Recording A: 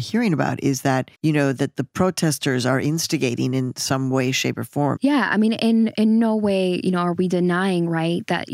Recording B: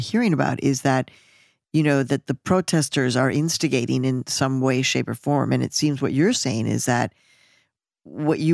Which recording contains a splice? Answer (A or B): A